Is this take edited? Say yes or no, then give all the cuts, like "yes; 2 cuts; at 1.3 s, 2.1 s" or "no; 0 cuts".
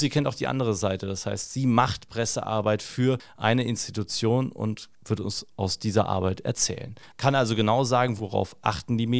yes; 2 cuts; at 7.1 s, 8.2 s